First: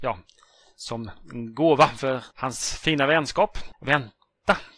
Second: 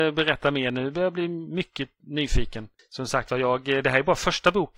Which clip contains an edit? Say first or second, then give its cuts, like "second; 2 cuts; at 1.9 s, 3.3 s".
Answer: first; 2 cuts; at 2.3 s, 3.7 s